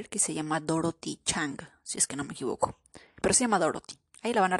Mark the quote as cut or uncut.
uncut